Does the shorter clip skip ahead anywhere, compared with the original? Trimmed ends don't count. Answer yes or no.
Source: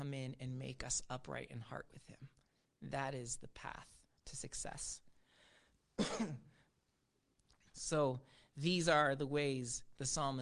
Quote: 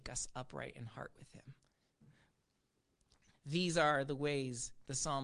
yes